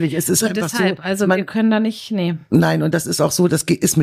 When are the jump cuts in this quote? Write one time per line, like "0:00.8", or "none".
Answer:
none